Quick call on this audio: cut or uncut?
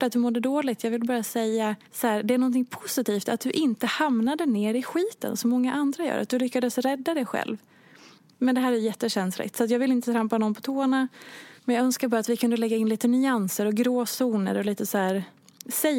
cut